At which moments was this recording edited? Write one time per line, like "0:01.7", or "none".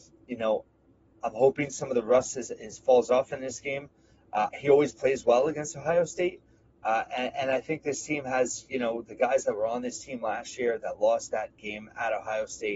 0:04.5